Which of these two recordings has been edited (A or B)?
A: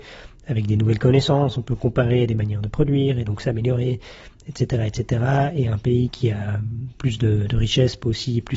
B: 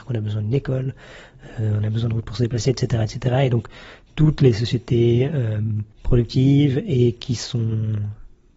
B